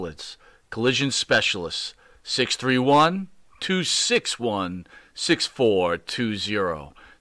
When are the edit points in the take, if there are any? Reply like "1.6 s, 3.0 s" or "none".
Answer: none